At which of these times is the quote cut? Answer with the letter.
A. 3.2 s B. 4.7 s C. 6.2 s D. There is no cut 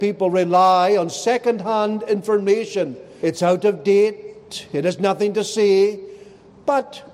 A